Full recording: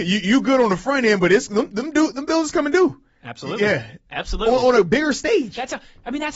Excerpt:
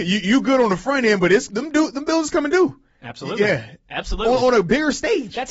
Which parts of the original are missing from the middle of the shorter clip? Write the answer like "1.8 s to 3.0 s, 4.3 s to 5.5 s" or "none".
1.5 s to 1.7 s